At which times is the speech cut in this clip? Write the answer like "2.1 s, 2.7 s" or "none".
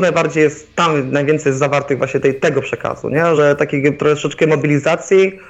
none